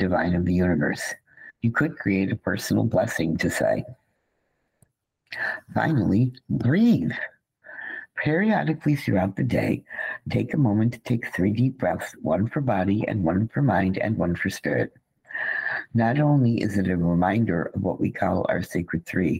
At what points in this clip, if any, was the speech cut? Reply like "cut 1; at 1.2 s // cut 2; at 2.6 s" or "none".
cut 1; at 1.6 s